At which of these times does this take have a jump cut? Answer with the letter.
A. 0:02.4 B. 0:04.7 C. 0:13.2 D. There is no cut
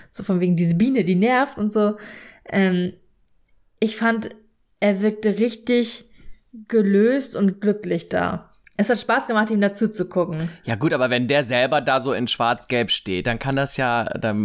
D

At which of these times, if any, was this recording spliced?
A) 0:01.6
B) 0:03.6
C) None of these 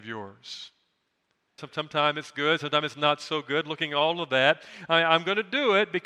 A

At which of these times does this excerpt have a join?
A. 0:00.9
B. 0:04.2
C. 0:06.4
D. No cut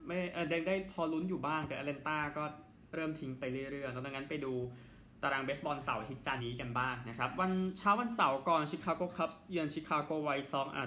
C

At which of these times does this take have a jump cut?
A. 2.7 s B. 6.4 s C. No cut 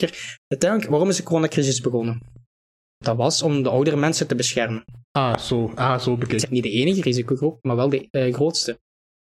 B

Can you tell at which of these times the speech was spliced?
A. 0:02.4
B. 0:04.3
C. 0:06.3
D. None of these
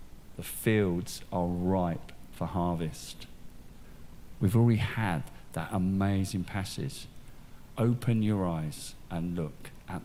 B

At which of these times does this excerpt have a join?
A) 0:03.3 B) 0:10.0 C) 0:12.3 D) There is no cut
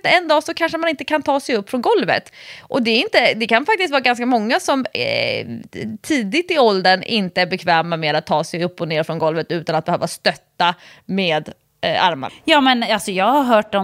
C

